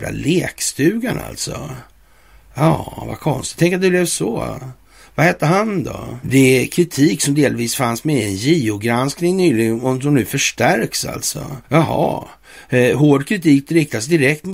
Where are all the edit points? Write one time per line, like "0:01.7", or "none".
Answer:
0:06.2
0:11.6